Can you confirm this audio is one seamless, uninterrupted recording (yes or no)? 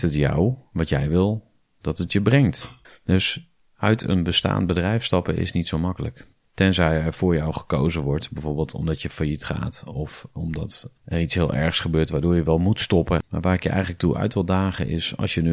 no